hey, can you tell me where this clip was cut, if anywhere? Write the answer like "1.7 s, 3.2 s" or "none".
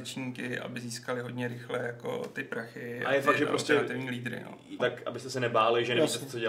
4.8 s